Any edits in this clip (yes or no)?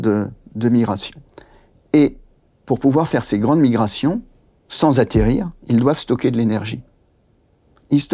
no